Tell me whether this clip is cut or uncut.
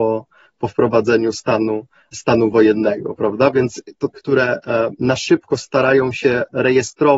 cut